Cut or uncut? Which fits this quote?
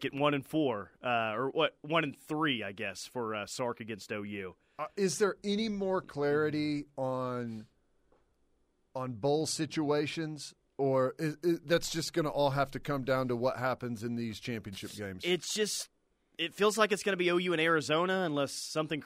uncut